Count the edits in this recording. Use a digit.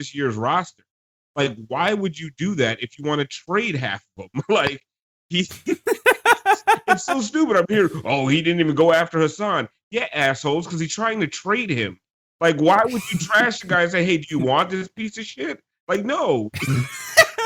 0